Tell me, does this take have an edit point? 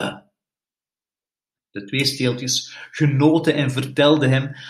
no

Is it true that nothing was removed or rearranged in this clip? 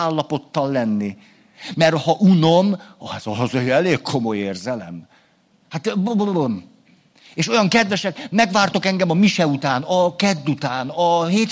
no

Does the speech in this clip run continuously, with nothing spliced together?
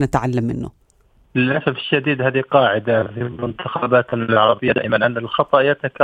yes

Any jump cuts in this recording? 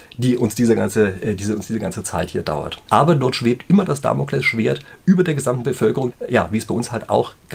yes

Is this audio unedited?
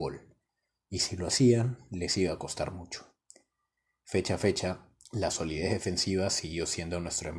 yes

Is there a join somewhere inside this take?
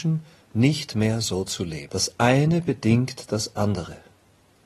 yes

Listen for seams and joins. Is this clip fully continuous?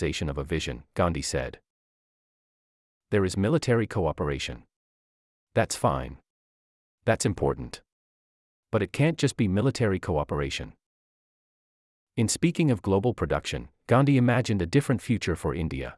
yes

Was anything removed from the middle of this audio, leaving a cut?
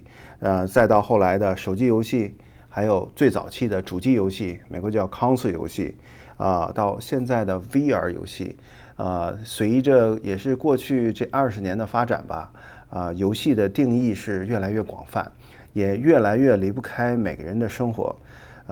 yes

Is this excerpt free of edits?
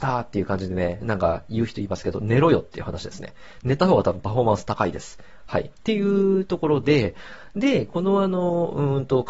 yes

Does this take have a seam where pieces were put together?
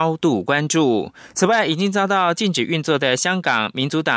yes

